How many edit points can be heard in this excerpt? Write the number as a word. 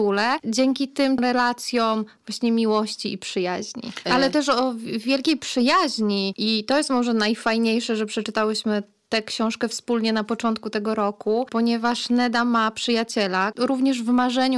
two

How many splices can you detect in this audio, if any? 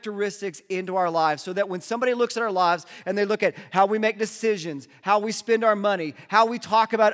zero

